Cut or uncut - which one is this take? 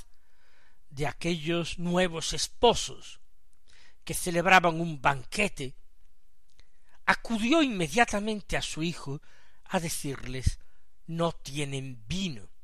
uncut